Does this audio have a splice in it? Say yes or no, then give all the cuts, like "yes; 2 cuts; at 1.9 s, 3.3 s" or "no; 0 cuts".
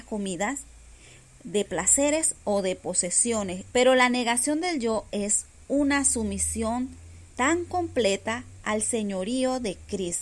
yes; 1 cut; at 3.7 s